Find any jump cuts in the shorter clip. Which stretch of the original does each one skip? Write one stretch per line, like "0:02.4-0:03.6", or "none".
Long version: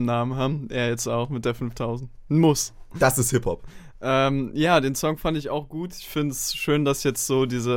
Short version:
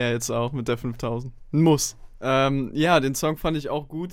0:02.9-0:03.9